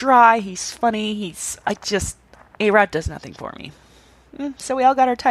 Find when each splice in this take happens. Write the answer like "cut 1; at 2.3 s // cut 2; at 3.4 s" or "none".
cut 1; at 2.4 s